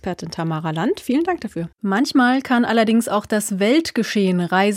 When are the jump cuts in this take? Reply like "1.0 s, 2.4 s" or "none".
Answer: 1.7 s